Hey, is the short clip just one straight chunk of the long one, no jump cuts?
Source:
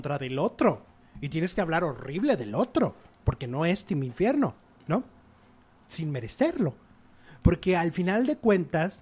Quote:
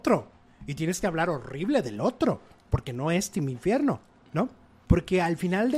no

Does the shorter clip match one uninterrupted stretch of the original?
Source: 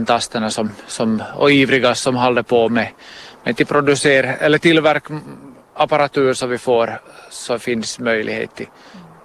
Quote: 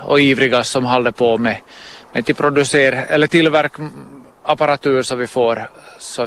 yes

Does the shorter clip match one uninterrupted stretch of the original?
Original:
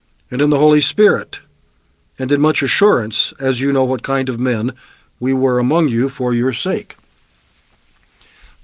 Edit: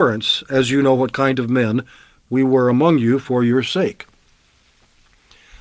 yes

